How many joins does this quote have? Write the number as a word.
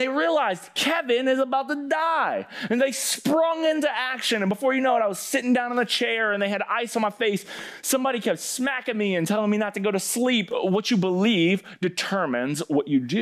one